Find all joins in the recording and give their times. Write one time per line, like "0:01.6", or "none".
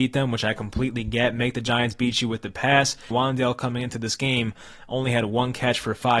0:03.1